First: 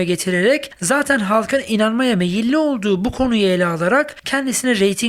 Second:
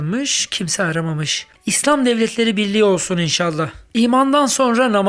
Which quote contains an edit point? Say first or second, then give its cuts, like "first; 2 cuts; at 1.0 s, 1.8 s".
second; 1 cut; at 1.6 s